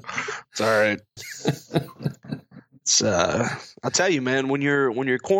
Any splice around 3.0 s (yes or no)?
no